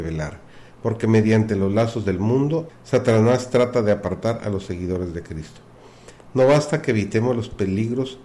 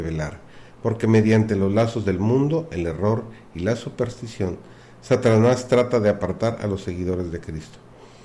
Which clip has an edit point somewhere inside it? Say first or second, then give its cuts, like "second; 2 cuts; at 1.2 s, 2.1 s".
first; 1 cut; at 2.7 s